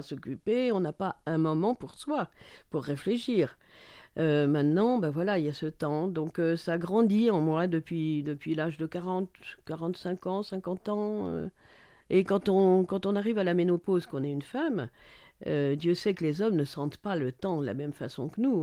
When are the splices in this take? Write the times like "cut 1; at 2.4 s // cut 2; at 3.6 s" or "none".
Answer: none